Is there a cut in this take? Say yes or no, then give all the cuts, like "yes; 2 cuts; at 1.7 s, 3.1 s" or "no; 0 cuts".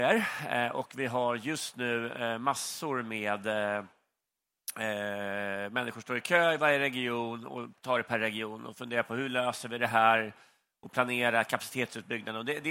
no; 0 cuts